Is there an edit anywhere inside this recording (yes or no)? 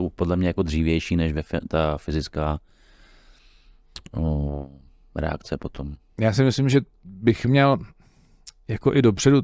no